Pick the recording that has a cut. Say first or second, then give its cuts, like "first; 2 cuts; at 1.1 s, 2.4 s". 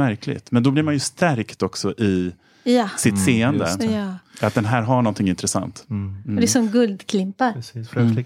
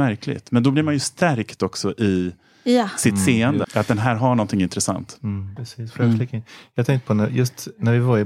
second; 2 cuts; at 3.6 s, 5.6 s